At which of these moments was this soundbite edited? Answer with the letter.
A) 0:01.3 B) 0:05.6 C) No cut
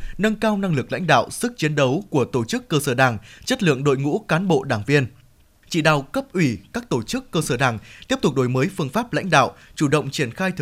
B